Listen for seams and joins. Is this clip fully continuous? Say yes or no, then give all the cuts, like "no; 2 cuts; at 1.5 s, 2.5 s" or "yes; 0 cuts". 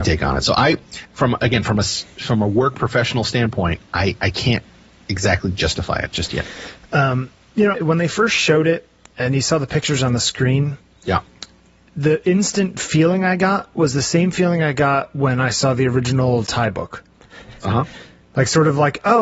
no; 2 cuts; at 1.0 s, 7.7 s